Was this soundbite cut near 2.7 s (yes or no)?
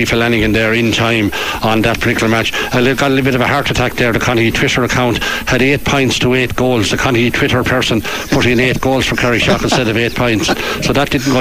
no